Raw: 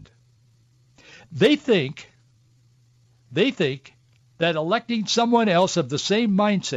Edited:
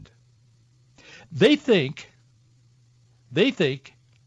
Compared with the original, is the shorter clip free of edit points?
yes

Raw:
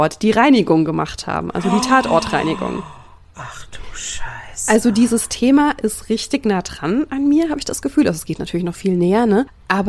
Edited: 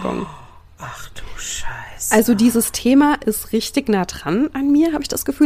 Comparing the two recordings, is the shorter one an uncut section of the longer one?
yes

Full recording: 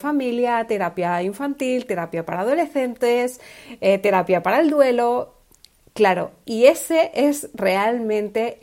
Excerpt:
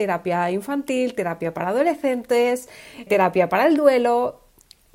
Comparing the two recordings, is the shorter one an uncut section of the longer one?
no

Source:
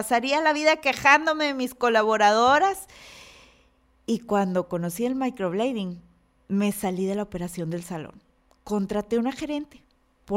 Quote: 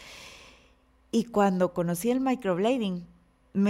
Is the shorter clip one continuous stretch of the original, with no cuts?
yes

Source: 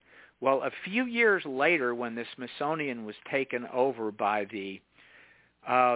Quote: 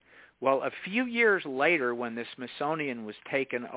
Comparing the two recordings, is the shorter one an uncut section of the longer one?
yes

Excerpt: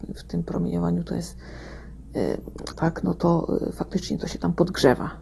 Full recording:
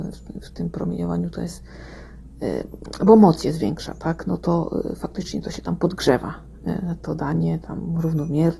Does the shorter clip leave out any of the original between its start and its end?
yes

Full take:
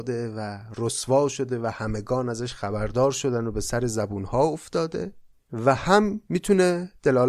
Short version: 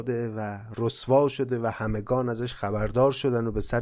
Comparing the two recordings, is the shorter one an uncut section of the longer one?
yes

